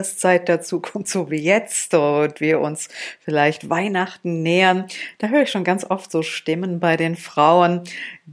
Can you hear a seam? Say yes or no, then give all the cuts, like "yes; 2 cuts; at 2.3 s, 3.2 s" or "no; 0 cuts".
no; 0 cuts